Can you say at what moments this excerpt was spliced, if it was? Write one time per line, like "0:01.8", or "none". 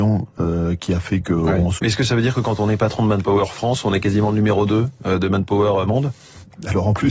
0:01.8